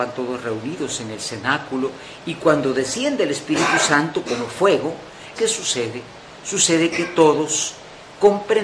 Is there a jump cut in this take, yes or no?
yes